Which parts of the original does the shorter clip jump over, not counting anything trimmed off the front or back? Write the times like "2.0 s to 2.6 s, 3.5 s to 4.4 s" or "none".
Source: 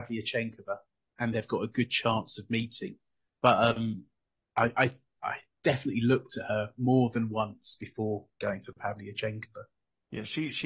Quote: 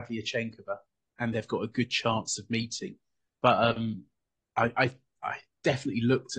none